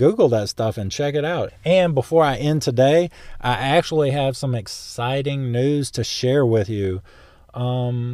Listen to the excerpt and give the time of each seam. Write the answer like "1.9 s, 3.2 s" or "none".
1.5 s